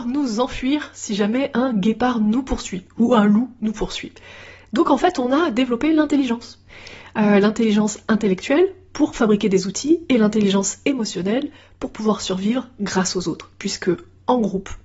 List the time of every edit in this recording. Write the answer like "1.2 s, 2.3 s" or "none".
none